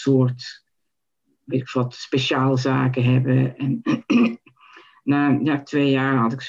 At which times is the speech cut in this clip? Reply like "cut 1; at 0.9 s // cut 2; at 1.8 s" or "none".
none

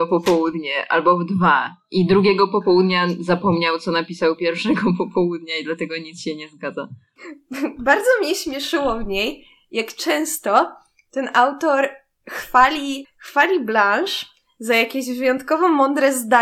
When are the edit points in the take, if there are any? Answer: cut 1; at 7.2 s // cut 2; at 13.0 s

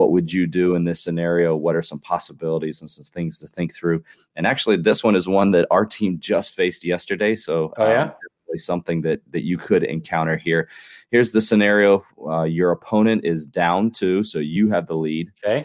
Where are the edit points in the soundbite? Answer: none

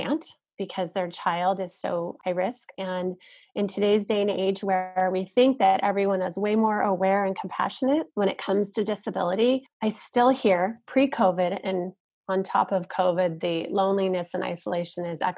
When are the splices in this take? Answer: cut 1; at 2.7 s

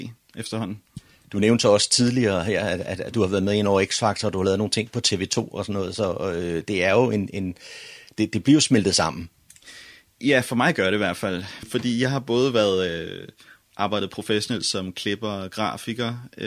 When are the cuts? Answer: none

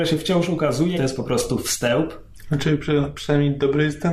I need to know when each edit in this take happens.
cut 1; at 0.9 s

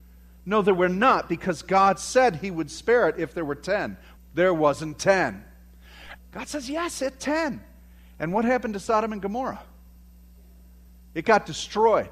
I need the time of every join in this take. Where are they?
cut 1; at 4.2 s // cut 2; at 6.2 s

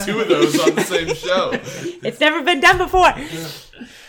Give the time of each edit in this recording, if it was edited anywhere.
none

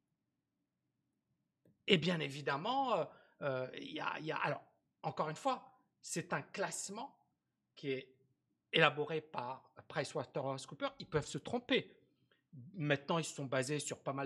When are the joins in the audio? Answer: none

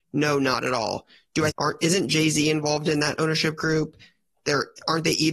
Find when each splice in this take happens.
cut 1; at 1.5 s

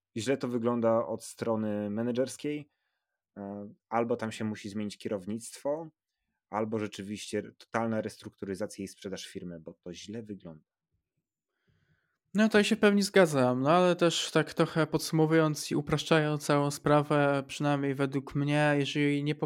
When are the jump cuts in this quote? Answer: cut 1; at 3.8 s

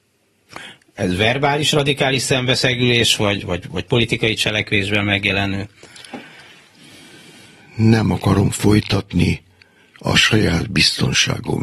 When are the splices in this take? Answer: cut 1; at 3.4 s

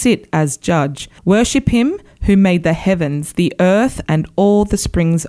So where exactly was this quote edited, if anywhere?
cut 1; at 1.2 s // cut 2; at 4.0 s

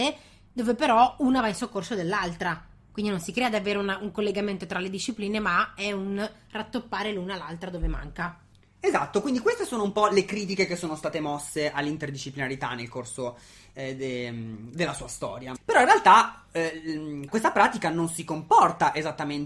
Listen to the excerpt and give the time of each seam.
cut 1; at 15.6 s // cut 2; at 17.3 s

